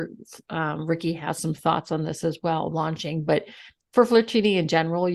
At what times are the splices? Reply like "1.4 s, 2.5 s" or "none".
2.7 s